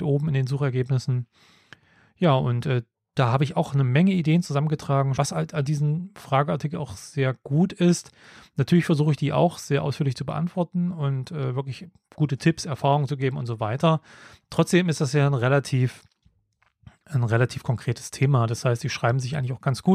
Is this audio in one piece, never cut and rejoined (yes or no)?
no